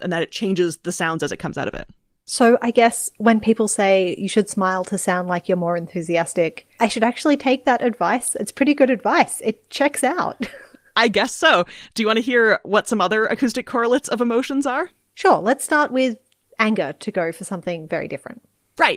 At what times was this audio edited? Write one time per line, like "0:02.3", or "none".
none